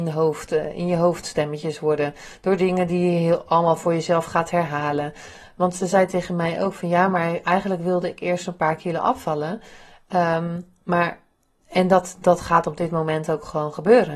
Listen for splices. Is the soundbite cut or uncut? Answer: uncut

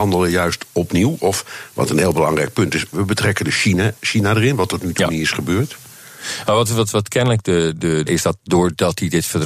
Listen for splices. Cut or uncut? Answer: cut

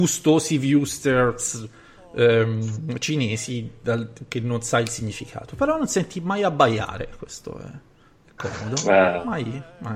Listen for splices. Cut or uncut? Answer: uncut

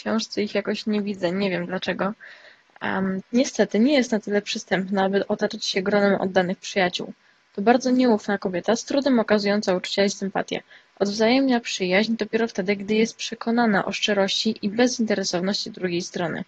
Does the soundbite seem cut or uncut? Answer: cut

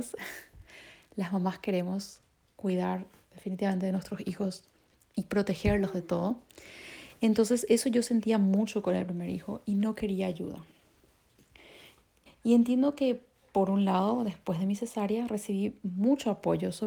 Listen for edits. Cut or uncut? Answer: cut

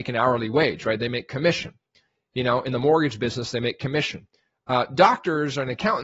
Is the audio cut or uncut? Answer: uncut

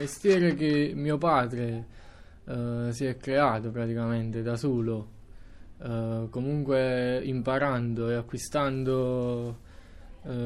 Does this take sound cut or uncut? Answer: uncut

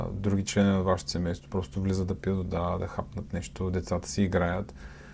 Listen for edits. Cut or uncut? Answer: uncut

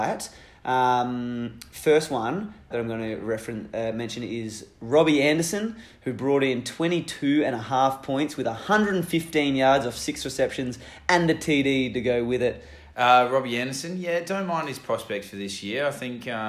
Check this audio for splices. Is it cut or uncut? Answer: cut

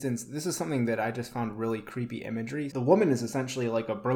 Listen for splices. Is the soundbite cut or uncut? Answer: cut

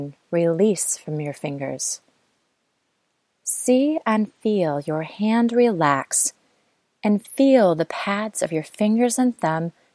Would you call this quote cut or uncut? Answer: uncut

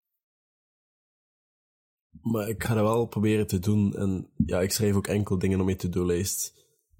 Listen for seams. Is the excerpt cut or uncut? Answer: uncut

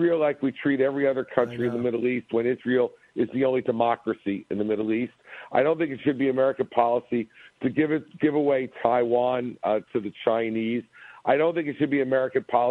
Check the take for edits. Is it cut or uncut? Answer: uncut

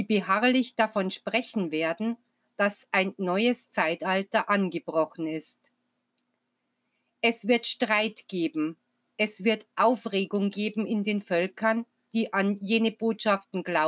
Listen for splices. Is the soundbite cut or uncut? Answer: cut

